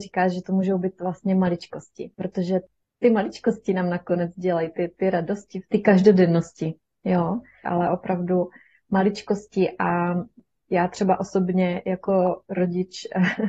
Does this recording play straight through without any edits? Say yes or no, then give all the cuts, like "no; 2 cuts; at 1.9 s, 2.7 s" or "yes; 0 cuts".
no; 2 cuts; at 2.1 s, 7.6 s